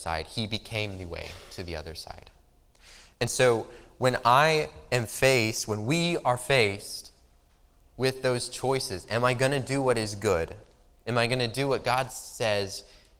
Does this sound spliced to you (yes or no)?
no